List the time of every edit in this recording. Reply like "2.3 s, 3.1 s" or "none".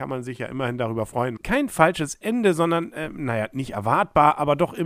1.4 s